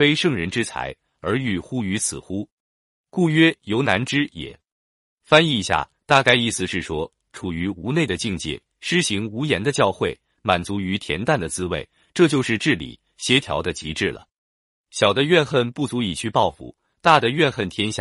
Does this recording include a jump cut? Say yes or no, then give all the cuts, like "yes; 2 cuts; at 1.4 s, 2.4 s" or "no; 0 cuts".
no; 0 cuts